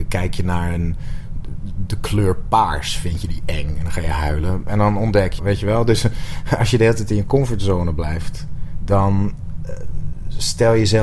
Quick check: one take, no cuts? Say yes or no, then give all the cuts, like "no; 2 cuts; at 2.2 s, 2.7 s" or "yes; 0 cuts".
no; 1 cut; at 5.4 s